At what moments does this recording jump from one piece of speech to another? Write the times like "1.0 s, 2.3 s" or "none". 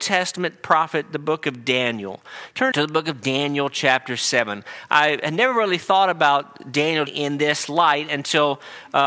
2.7 s, 7.1 s